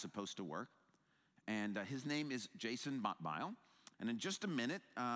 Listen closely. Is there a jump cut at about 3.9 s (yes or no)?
yes